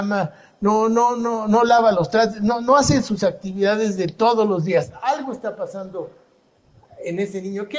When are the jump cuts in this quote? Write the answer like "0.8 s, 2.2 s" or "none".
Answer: none

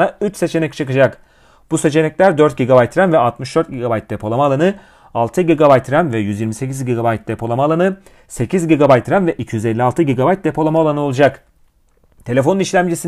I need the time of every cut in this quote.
none

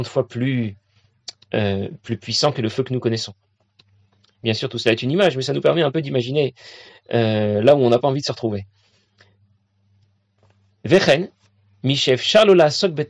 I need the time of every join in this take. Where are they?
none

